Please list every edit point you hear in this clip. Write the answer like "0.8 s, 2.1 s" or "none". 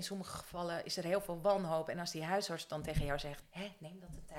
3.4 s